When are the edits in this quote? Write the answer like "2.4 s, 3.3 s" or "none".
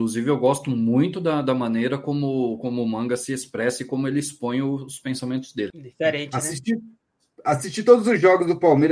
5.7 s